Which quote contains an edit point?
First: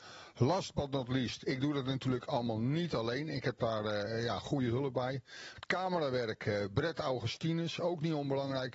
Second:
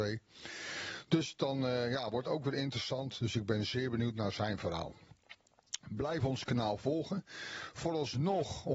first; 1 cut; at 5.5 s

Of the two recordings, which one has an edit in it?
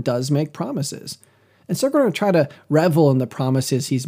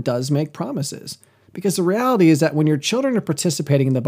second; 1 cut; at 1.4 s

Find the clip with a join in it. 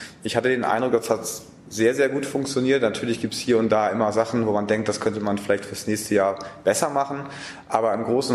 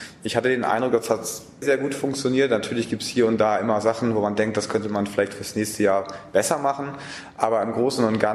second; 1 cut; at 1.6 s

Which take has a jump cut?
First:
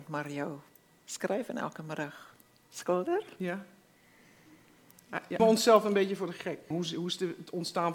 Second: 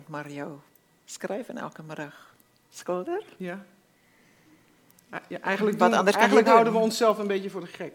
first; 2 cuts; at 5.4 s, 6.7 s

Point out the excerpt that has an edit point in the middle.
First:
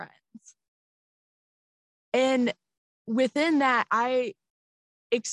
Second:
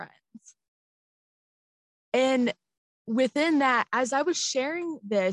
first; 1 cut; at 3.9 s

